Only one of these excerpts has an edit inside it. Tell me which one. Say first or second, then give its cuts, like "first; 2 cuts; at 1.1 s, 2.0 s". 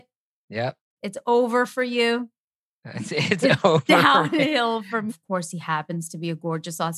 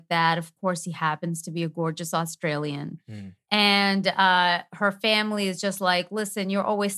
first; 1 cut; at 5.1 s